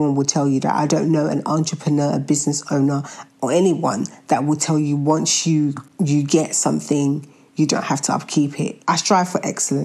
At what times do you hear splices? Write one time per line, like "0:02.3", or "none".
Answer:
0:03.3
0:08.8

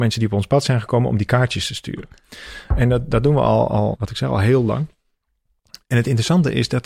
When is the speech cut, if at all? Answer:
0:04.0

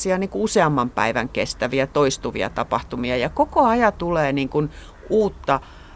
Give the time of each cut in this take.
none

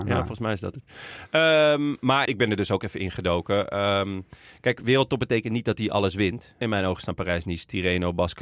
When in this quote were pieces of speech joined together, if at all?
0:02.3
0:06.6

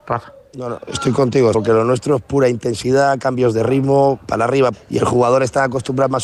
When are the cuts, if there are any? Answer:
0:01.5
0:04.7

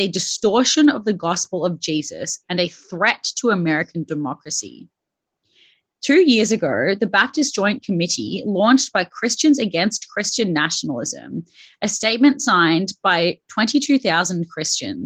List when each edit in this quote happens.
0:05.8

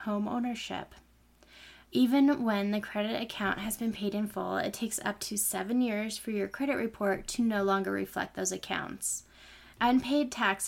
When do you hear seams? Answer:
0:01.9
0:09.7

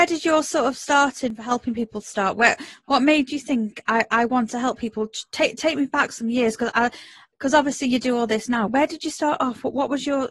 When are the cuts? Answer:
0:08.7

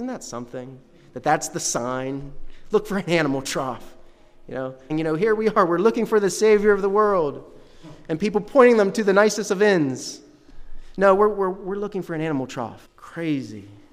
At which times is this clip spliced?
0:04.9
0:12.8

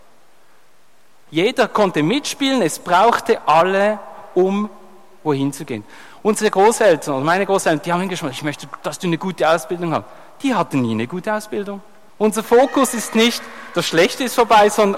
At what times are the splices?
0:08.3
0:12.1

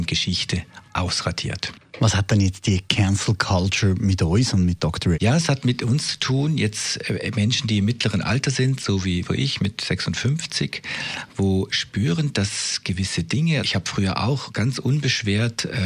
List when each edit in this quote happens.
0:05.1
0:13.6

